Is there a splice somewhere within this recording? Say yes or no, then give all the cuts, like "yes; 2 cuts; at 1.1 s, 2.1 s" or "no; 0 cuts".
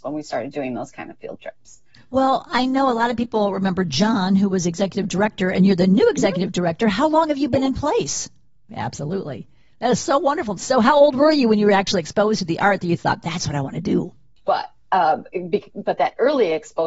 yes; 3 cuts; at 8.7 s, 10.6 s, 14.4 s